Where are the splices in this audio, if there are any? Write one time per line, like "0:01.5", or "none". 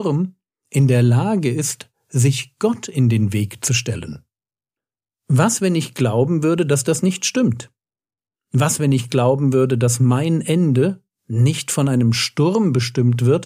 none